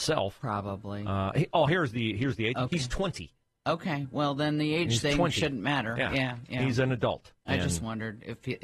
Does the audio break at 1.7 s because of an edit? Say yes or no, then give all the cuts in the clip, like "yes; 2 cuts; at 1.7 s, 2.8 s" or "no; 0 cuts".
no; 0 cuts